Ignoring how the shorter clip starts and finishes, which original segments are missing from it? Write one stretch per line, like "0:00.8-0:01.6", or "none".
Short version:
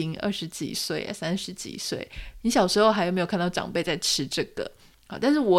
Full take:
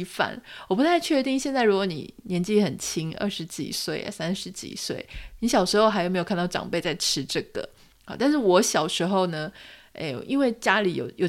none

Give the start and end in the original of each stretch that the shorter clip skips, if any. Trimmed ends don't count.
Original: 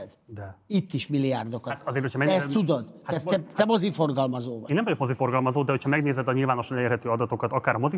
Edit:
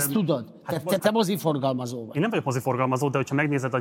0:03.4-0:03.5

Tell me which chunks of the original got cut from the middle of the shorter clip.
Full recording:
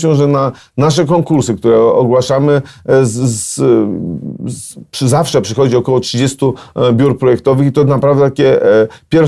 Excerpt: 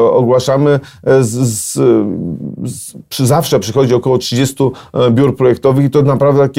none

